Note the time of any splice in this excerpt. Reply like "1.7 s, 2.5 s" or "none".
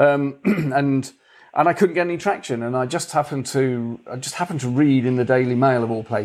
none